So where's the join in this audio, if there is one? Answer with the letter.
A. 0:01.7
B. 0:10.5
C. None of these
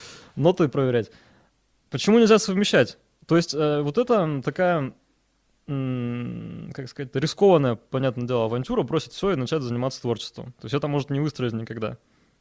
C